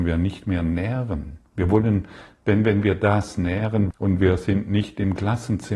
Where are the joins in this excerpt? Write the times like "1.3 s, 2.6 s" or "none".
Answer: 1.5 s, 3.9 s